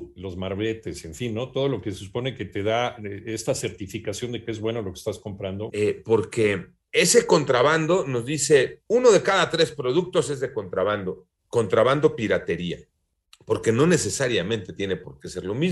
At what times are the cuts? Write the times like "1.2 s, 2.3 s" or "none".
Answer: 5.7 s, 8.9 s, 11.4 s